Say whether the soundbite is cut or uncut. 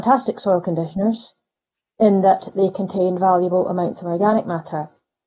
uncut